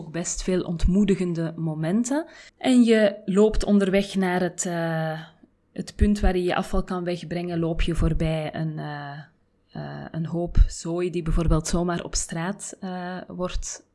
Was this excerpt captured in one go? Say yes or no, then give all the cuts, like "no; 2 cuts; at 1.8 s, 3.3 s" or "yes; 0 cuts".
no; 1 cut; at 2.5 s